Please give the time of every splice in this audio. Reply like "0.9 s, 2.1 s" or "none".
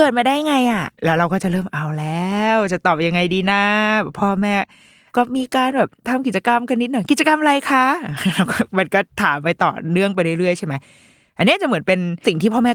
0.9 s